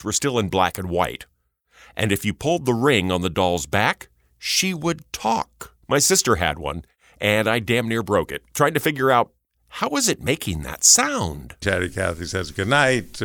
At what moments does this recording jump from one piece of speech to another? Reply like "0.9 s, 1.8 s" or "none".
5.8 s, 11.6 s